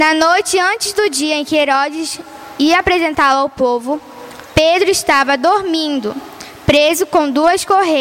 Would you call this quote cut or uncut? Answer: uncut